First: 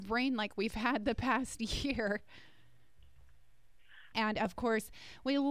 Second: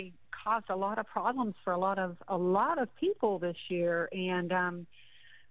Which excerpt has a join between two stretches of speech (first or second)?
first